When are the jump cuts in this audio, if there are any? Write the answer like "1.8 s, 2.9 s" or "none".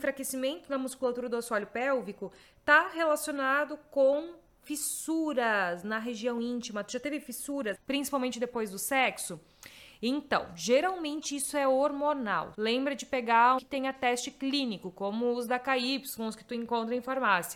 7.7 s, 12.5 s, 13.6 s